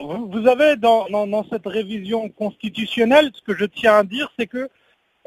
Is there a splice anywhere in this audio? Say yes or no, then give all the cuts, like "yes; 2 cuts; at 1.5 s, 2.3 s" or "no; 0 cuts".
yes; 1 cut; at 3.3 s